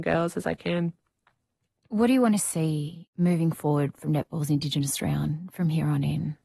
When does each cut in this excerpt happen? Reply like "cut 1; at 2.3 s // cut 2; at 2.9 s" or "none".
none